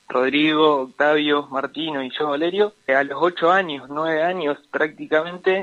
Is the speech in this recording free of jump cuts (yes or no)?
no